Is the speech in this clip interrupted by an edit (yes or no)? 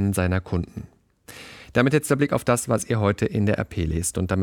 no